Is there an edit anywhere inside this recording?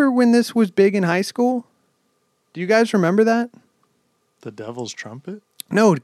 no; 0 cuts

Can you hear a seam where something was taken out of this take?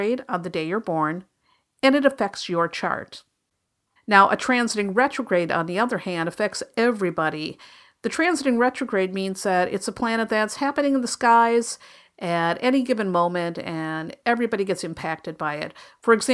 yes; 1 cut; at 4.0 s

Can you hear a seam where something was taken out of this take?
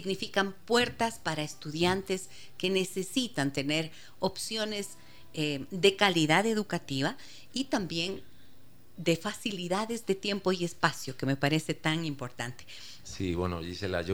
yes; 1 cut; at 13.0 s

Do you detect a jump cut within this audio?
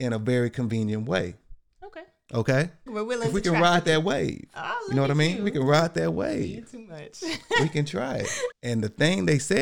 yes; 2 cuts; at 2.9 s, 8.5 s

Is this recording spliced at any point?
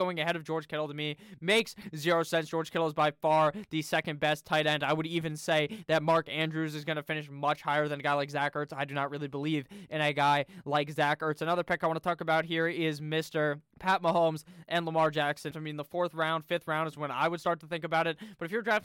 yes; 2 cuts; at 13.7 s, 15.5 s

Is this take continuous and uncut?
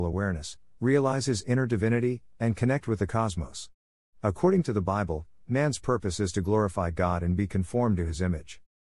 yes; 0 cuts

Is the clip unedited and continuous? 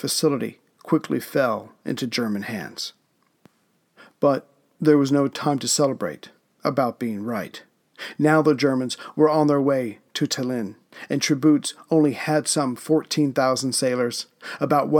yes; 0 cuts

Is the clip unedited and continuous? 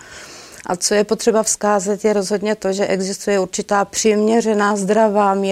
yes; 0 cuts

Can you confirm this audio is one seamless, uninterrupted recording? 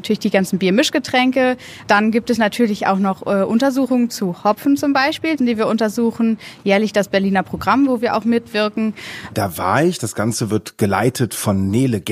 no; 3 cuts; at 1.8 s, 5.4 s, 9.3 s

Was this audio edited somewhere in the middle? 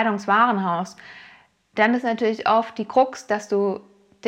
no; 0 cuts

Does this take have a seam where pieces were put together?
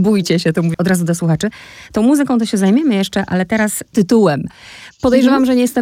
no; 0 cuts

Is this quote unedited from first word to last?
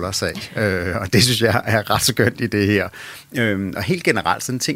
yes; 0 cuts

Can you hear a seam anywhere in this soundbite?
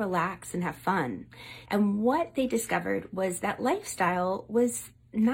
yes; 1 cut; at 1.7 s

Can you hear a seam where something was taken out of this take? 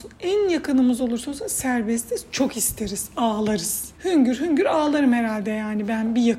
yes; 1 cut; at 3.9 s

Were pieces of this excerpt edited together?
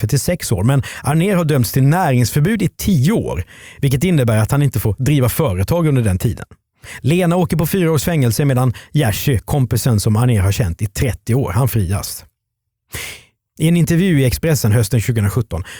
yes; 1 cut; at 13.5 s

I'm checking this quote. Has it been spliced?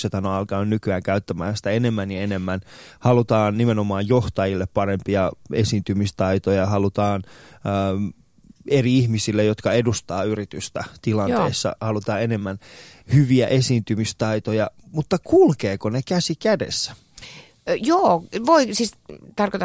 no; 0 cuts

